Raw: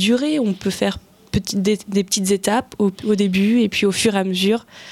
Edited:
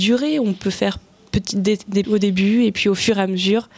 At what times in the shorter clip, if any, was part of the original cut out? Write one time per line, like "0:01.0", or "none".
0:02.0